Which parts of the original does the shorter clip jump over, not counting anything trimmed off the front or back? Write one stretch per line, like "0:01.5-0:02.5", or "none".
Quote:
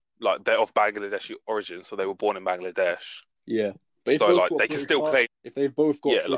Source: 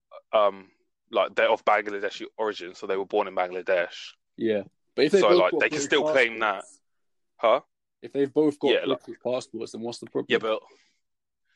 0:05.1-0:05.2
0:06.3-0:07.8

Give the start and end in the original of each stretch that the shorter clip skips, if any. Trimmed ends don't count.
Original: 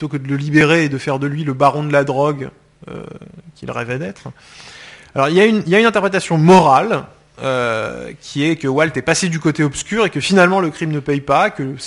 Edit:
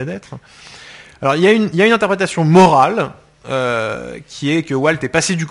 none

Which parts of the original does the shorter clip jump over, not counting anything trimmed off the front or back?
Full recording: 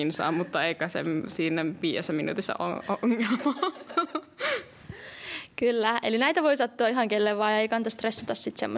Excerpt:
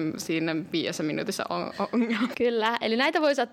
0:03.4-0:05.6

